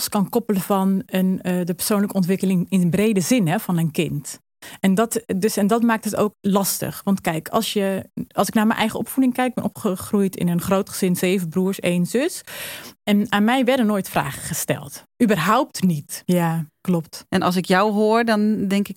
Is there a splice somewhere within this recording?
yes; 1 cut; at 16.3 s

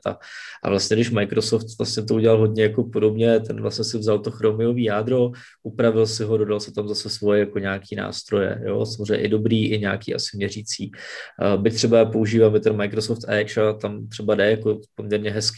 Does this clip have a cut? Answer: no; 0 cuts

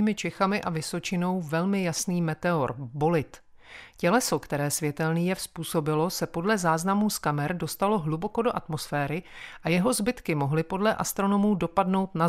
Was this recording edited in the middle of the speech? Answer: no; 0 cuts

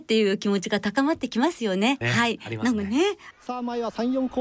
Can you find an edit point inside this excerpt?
yes; 2 cuts; at 2.0 s, 3.3 s

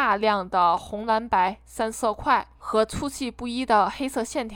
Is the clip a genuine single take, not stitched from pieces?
no; 1 cut; at 1.9 s

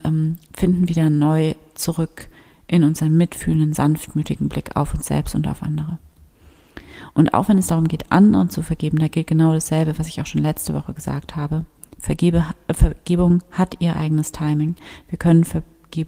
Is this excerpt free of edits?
yes; 0 cuts

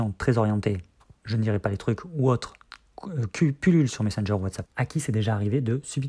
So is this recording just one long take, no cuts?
no; 1 cut; at 4.6 s

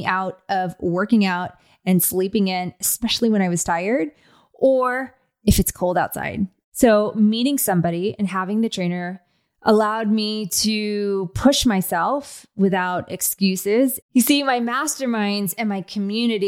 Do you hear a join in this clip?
yes; 2 cuts; at 6.6 s, 14.0 s

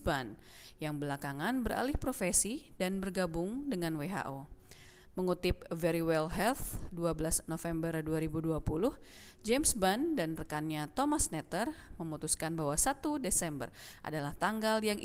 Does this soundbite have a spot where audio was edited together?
no; 0 cuts

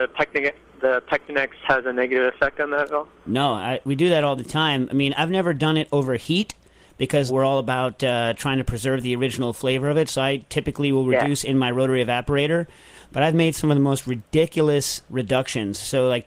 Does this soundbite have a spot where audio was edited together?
yes; 1 cut; at 7.3 s

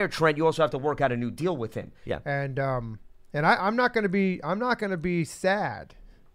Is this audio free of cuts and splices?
no; 1 cut; at 2.0 s

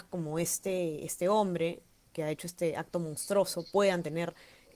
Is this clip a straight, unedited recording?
yes; 0 cuts

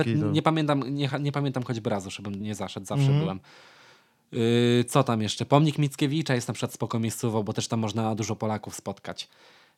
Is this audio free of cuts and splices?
no; 1 cut; at 2.4 s

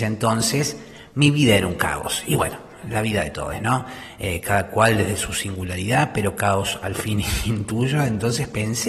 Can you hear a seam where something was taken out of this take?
no; 0 cuts

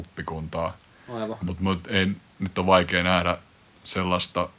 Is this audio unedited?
yes; 0 cuts

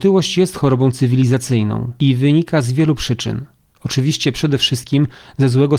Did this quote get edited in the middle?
no; 0 cuts

